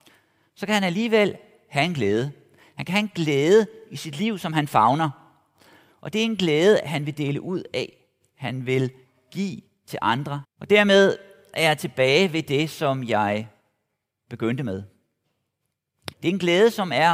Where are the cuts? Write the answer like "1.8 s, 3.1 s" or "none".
10.4 s, 16.1 s